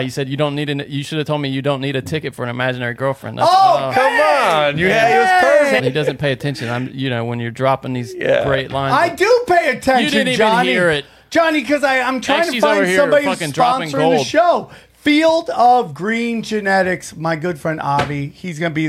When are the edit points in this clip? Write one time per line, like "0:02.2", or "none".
0:05.8